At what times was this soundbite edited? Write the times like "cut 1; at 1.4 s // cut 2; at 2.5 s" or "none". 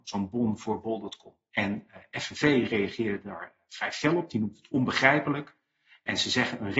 none